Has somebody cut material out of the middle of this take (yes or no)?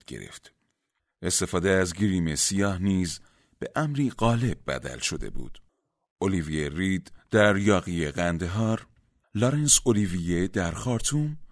no